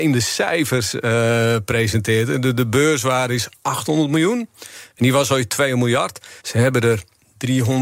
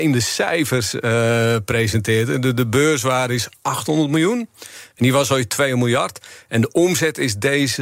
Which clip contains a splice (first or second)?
first